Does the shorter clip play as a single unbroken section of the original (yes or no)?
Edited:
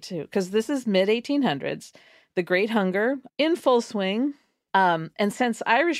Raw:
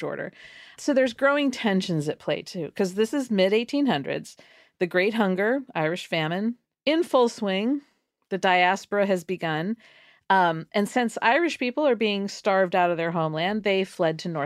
no